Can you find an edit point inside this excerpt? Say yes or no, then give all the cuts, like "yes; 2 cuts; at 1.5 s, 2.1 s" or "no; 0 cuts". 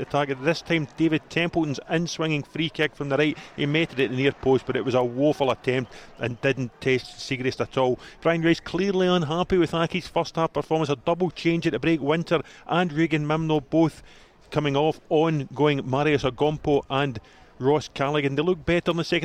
no; 0 cuts